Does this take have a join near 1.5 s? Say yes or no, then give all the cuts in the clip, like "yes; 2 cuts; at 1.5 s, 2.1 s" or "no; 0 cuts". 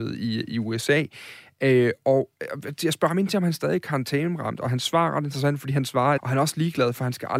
no; 1 cut; at 6.2 s